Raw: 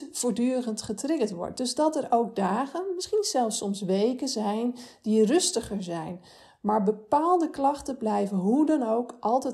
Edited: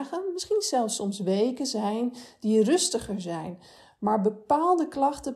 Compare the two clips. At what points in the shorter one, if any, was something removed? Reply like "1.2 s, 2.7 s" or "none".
none